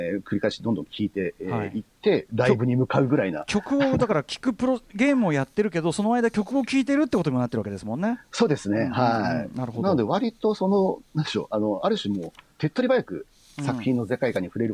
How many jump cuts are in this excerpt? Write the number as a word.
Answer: zero